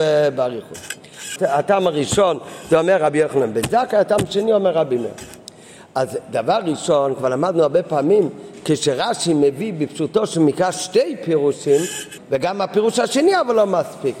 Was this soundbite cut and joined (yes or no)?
yes